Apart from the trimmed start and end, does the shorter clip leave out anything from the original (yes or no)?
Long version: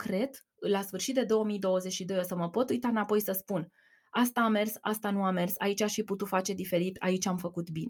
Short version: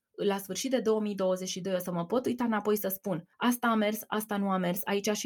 yes